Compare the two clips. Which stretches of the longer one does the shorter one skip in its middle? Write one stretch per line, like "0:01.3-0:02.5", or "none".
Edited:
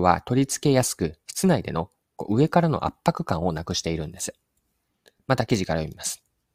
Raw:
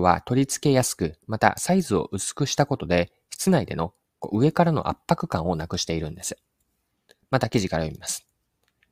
0:01.2-0:03.2